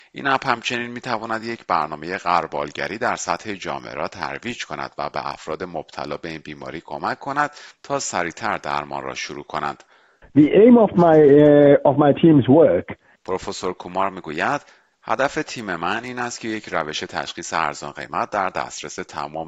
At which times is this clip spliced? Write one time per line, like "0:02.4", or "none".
0:10.2
0:13.2